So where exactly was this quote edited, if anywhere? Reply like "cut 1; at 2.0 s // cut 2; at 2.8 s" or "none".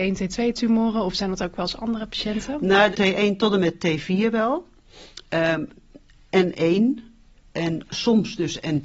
cut 1; at 2.9 s

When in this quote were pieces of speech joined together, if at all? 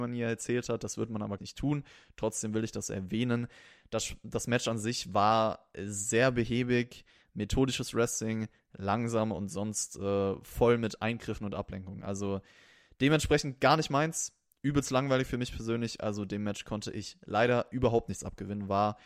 cut 1; at 1.4 s

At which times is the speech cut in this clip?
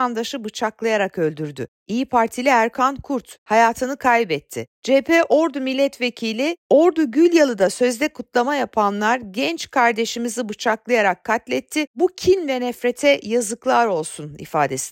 cut 1; at 4.7 s

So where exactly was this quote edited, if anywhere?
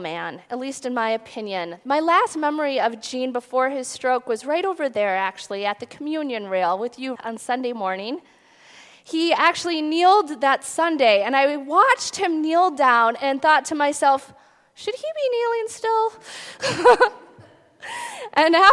cut 1; at 7.2 s

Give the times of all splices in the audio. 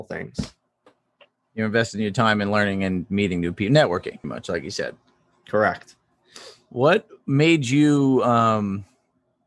cut 1; at 4.2 s

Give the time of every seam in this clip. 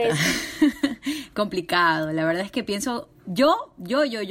none

